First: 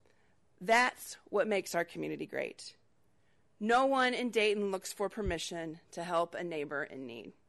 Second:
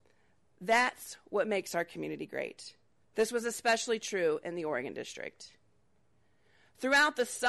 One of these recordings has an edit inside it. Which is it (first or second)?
second